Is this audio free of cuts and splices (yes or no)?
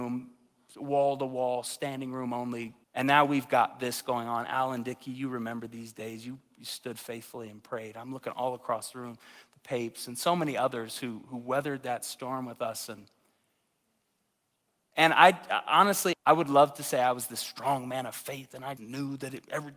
no